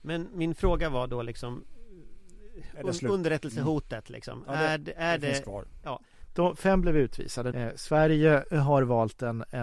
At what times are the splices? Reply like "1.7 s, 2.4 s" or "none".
6.3 s, 7.5 s